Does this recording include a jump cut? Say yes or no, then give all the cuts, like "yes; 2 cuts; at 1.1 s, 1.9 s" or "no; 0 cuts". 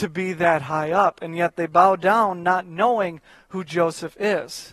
no; 0 cuts